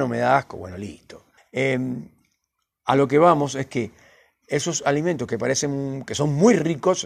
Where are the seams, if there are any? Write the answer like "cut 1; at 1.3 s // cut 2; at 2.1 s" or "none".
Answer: cut 1; at 1.4 s